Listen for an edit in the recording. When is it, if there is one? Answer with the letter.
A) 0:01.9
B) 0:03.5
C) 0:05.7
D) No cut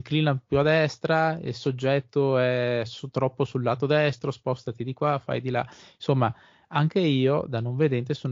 D